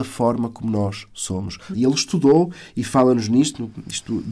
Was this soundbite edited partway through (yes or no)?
yes